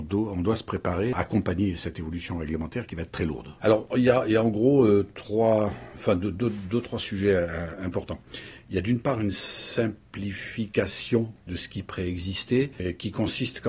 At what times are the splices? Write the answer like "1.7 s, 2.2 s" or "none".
3.6 s